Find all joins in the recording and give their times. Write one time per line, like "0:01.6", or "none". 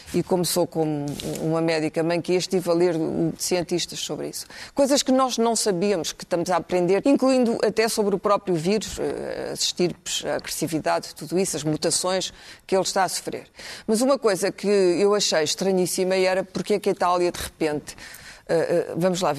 0:03.4
0:07.0